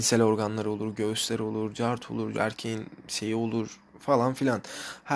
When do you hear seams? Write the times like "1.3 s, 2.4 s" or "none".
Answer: 2.3 s